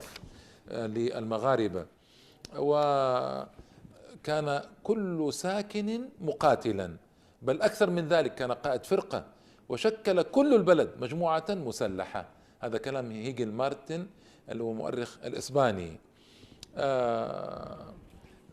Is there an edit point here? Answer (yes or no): no